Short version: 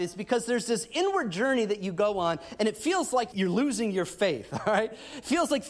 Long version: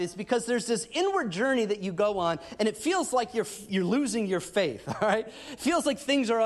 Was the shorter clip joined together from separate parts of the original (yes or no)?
yes